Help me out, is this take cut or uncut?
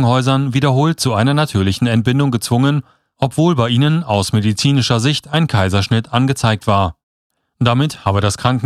uncut